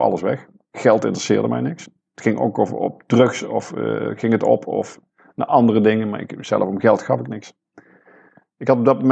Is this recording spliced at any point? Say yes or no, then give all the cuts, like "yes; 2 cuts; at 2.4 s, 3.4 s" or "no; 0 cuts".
no; 0 cuts